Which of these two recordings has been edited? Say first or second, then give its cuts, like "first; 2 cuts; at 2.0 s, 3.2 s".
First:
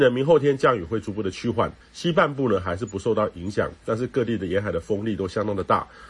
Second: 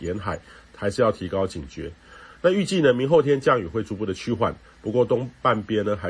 first; 1 cut; at 1.8 s